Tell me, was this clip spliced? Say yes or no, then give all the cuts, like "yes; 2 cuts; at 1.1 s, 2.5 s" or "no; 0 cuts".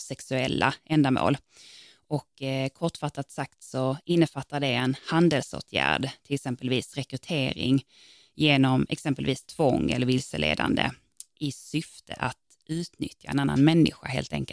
no; 0 cuts